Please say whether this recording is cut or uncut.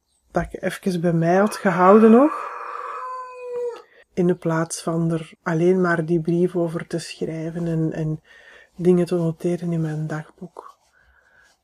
cut